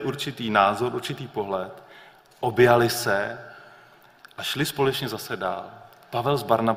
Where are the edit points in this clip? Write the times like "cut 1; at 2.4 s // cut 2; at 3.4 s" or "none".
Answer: none